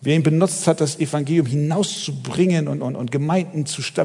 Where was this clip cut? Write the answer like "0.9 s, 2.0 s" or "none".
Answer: none